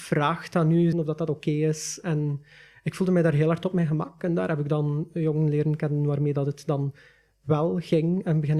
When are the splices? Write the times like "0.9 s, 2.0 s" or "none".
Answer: 0.9 s